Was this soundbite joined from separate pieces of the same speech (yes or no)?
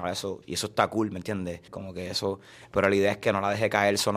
yes